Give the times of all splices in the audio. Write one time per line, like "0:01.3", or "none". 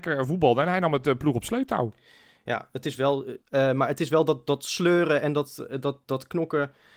0:03.4